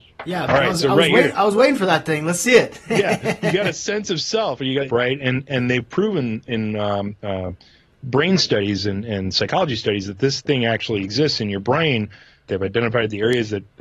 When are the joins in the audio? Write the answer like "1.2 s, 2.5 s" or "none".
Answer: 4.9 s, 12.5 s

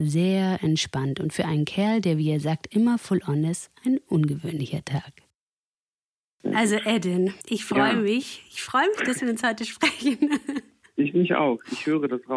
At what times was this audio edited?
7.4 s

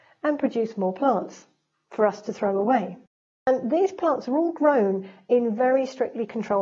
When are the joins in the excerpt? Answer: none

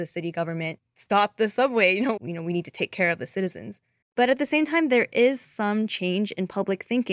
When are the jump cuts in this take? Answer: 2.2 s, 4.0 s

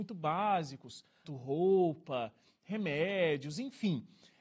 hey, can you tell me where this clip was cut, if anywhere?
1.2 s

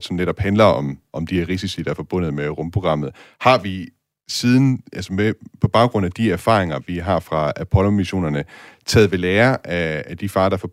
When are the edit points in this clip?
none

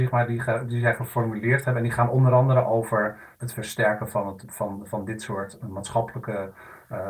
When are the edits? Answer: none

